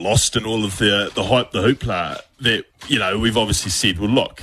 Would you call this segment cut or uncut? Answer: uncut